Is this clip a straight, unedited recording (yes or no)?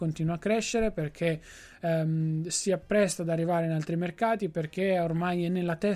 yes